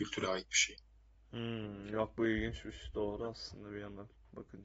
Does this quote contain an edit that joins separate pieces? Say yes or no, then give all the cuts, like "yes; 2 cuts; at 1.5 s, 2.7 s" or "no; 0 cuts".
no; 0 cuts